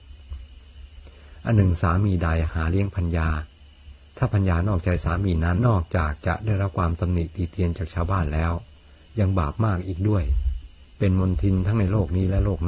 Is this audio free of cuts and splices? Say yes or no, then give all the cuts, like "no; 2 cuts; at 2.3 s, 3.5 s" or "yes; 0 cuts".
no; 1 cut; at 5.6 s